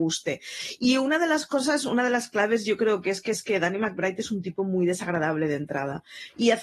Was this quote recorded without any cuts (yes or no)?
yes